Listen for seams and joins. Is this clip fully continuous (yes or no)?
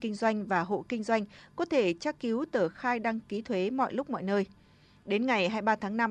yes